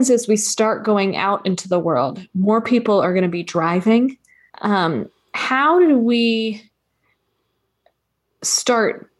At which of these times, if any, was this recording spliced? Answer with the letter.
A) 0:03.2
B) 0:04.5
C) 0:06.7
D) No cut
B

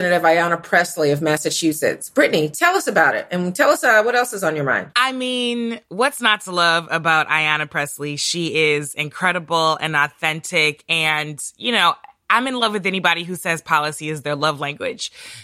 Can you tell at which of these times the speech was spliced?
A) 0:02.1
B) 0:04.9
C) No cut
B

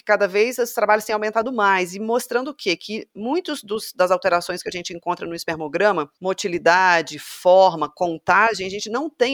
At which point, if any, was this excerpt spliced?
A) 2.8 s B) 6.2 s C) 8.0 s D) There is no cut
B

